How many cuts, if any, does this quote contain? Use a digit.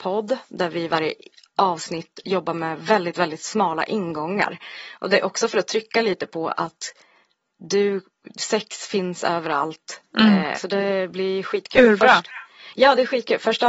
1